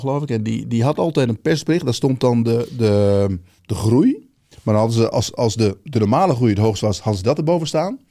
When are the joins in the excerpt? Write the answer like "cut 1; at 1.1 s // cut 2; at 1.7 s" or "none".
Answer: cut 1; at 3.6 s